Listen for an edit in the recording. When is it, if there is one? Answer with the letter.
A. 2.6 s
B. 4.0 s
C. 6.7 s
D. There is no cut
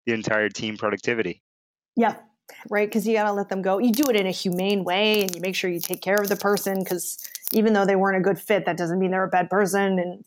A